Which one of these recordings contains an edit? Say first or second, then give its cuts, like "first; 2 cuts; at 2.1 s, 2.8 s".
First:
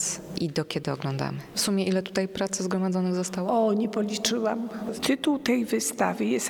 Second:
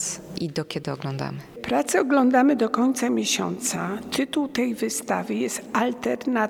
first; 2 cuts; at 1.5 s, 4.9 s